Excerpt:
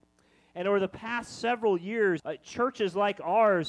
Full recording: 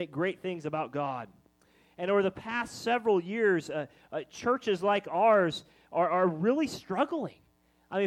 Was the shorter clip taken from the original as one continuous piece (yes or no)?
no